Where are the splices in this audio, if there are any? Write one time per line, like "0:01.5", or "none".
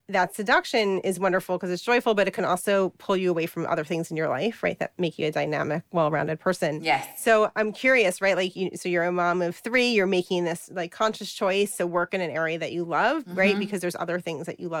none